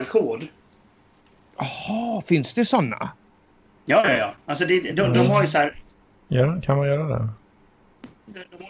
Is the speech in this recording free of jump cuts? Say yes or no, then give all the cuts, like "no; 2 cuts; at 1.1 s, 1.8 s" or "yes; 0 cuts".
yes; 0 cuts